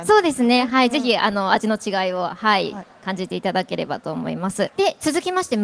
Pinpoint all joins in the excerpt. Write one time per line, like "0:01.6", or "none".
0:04.7